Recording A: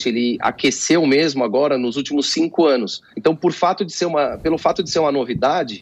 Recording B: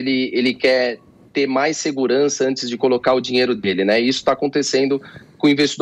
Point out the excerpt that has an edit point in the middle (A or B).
A